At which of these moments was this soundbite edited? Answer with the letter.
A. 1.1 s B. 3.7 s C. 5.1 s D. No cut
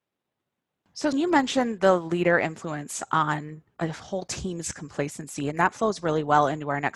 A